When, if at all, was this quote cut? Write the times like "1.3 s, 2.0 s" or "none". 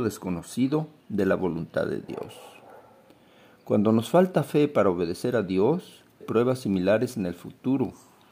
6.2 s